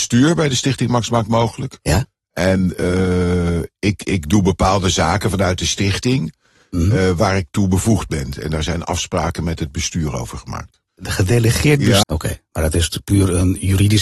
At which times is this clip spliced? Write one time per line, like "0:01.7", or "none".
0:10.9
0:12.0